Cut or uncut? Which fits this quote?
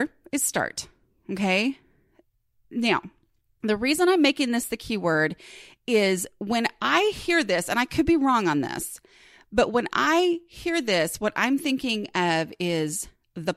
uncut